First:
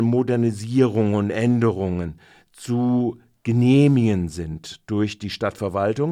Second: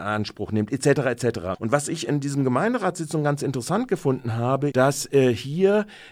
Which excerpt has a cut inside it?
second; 2 cuts; at 1.5 s, 4.7 s

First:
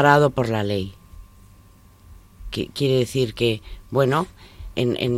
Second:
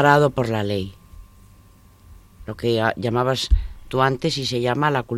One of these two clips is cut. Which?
second; 1 cut; at 2.4 s

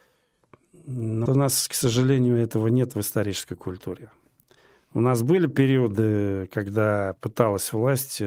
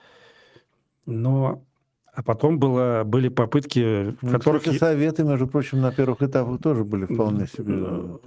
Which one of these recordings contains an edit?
first; 1 cut; at 1.3 s

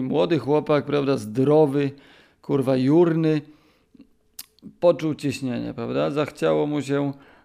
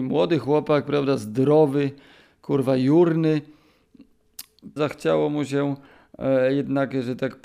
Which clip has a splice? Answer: second; 1 cut; at 4.8 s

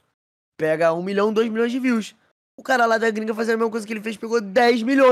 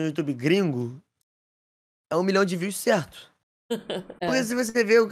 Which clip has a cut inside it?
second; 1 cut; at 4.2 s

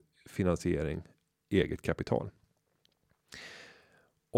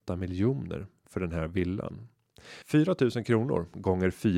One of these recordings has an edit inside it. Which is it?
second; 1 cut; at 2.6 s

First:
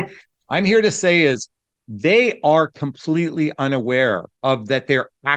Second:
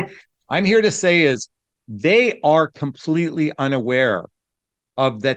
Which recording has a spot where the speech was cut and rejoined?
first; 1 cut; at 4.3 s

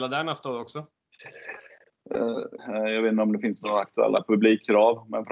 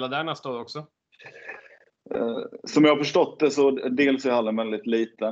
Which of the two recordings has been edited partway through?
first; 1 cut; at 2.6 s

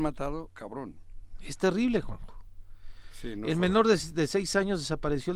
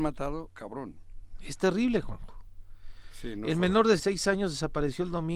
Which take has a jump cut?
second; 1 cut; at 4.0 s

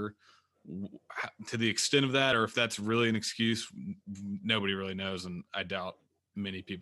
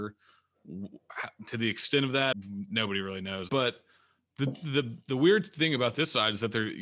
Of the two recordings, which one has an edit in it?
second; 2 cuts; at 2.3 s, 3.5 s

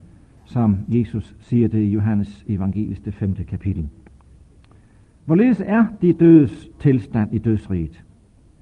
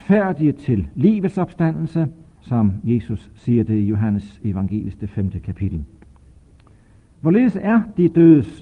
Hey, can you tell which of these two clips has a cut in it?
second; 1 cut; at 2.4 s

